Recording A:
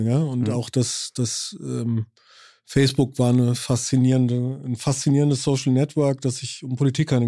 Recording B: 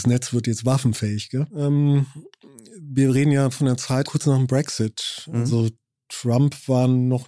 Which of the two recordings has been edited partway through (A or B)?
B